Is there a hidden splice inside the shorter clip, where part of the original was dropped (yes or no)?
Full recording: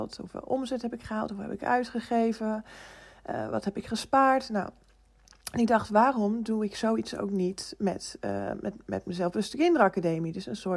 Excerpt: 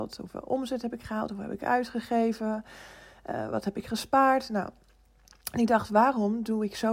no